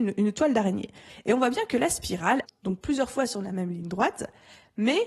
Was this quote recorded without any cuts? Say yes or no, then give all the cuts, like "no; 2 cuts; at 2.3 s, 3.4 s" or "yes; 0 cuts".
no; 2 cuts; at 1.1 s, 2.4 s